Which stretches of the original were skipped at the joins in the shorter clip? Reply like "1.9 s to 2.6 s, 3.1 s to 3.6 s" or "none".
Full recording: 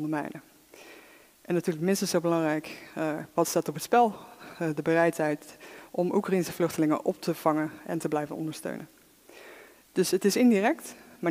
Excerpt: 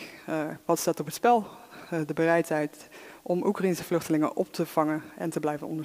none